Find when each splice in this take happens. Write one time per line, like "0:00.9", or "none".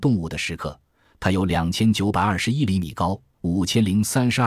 none